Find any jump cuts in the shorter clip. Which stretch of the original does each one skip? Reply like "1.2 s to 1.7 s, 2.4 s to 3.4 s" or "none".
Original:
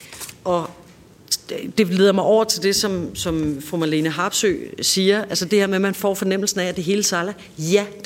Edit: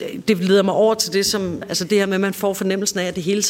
3.1 s to 5.2 s